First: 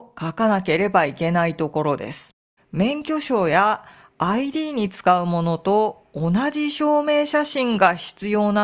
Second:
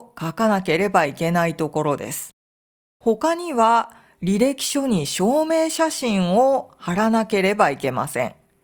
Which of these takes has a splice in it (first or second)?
first